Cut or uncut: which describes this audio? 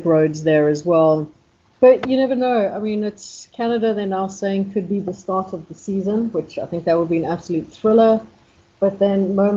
cut